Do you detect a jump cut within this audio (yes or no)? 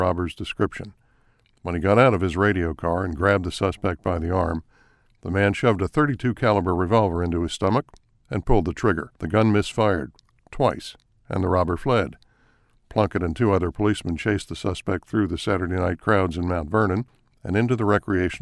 yes